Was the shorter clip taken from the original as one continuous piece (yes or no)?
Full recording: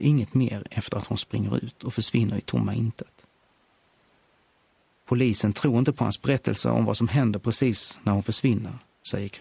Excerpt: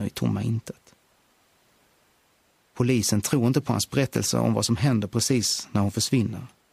yes